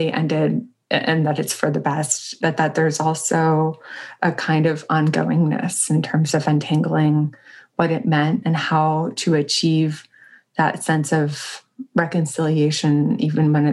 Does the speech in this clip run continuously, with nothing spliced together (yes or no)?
no